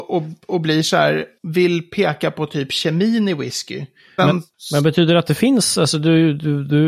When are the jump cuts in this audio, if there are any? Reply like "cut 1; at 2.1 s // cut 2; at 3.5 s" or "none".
cut 1; at 4.2 s